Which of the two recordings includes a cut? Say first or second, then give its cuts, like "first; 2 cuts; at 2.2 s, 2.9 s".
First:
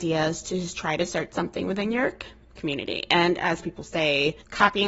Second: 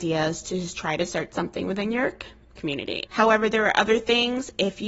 second; 1 cut; at 3.1 s